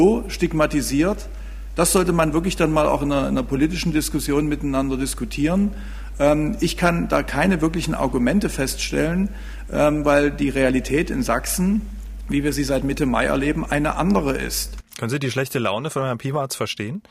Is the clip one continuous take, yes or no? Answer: yes